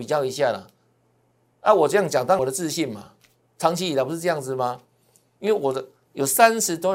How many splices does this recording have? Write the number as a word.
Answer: one